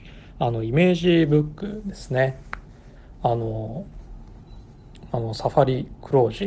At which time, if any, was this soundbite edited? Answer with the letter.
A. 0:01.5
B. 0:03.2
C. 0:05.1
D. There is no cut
C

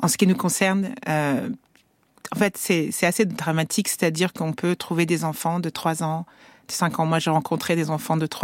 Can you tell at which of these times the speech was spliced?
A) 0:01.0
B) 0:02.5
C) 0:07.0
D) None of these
D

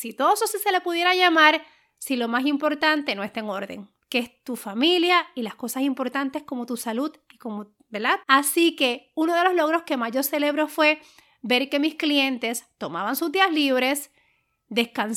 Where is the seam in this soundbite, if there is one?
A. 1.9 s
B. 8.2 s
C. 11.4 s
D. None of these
B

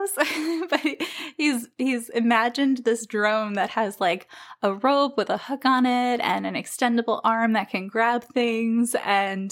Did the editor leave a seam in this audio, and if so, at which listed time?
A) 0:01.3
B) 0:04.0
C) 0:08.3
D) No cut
D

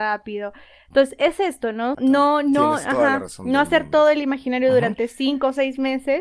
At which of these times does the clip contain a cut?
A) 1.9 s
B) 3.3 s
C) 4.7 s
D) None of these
A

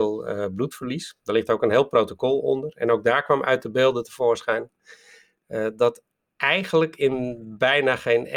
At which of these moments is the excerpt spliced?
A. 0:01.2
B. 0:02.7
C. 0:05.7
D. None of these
D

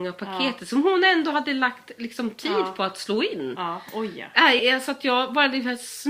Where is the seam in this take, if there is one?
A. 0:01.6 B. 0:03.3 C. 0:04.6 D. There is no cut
C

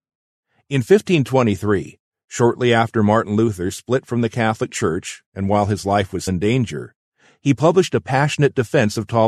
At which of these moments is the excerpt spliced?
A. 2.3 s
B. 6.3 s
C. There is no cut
B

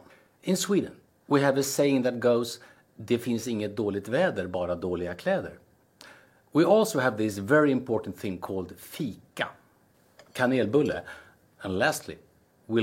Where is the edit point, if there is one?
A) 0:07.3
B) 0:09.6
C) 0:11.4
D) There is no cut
D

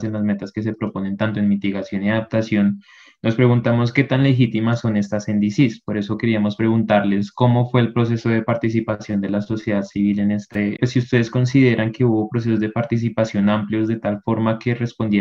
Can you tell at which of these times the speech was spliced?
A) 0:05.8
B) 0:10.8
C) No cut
B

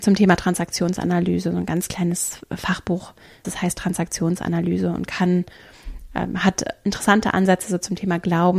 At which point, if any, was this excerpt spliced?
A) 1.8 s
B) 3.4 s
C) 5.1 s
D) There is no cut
B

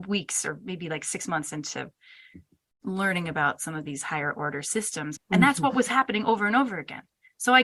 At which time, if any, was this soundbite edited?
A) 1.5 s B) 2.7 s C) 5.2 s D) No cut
C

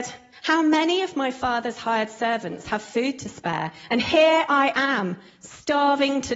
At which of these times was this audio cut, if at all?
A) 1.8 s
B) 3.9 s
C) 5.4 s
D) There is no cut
D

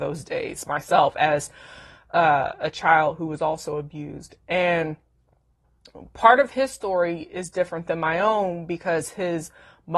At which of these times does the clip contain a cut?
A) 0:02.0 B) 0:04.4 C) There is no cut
C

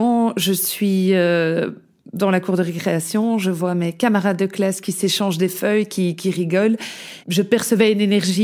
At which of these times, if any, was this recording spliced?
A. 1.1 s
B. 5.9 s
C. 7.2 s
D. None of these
C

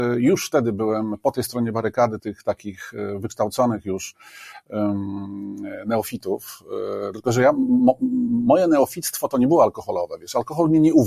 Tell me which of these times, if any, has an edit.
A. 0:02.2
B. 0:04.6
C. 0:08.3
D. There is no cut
A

